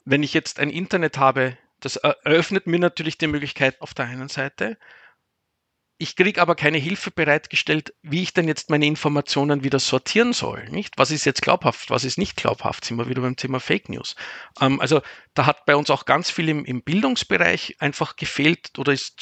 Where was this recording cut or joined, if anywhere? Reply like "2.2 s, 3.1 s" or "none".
3.8 s